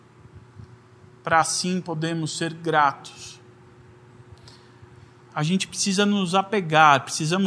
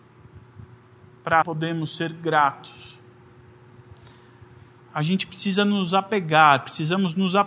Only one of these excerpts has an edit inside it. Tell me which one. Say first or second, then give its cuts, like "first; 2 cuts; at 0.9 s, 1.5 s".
second; 1 cut; at 1.4 s